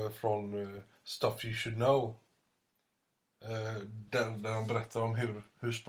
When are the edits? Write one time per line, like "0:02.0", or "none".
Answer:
none